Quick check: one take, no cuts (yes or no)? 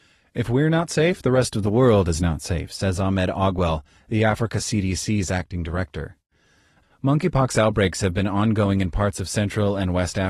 no